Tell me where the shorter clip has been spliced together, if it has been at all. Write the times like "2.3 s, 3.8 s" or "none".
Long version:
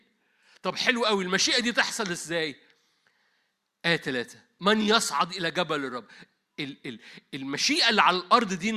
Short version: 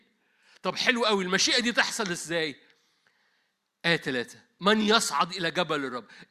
none